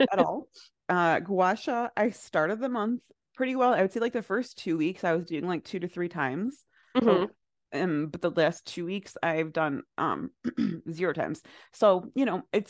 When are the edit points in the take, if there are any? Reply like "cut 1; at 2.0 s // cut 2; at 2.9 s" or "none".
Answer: none